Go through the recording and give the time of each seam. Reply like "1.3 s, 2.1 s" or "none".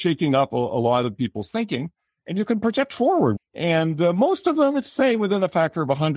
3.4 s